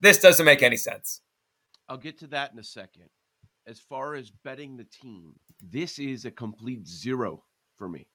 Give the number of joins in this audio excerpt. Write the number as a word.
one